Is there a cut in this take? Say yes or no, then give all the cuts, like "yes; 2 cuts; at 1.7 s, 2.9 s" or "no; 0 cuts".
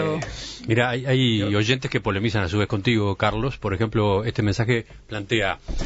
no; 0 cuts